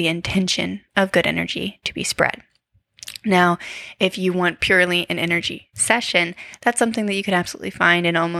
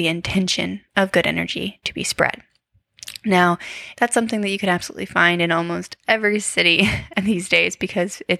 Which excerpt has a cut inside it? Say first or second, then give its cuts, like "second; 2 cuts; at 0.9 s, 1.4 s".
second; 1 cut; at 3.9 s